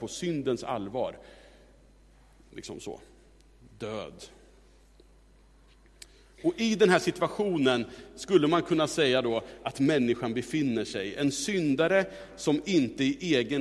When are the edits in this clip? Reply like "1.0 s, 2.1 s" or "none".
none